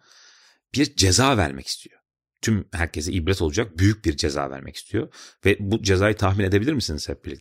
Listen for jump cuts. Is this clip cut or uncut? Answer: uncut